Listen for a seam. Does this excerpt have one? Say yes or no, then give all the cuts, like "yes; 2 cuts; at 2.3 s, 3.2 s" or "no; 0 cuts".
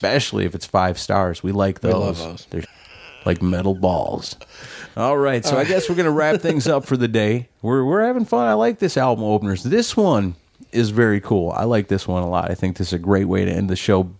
yes; 2 cuts; at 2.6 s, 4.9 s